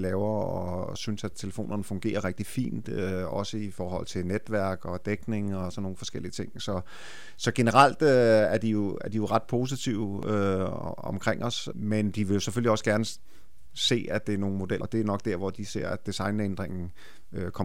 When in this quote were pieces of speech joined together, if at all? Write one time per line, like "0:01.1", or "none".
0:14.8